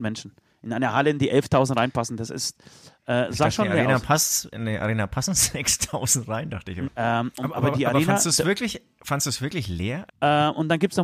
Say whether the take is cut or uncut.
cut